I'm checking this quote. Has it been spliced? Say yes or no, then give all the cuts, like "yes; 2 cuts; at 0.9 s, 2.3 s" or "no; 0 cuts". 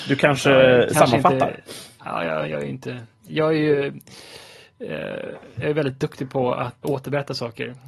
yes; 1 cut; at 6.8 s